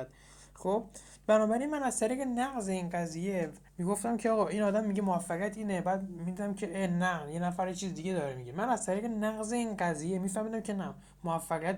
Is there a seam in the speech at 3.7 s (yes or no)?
yes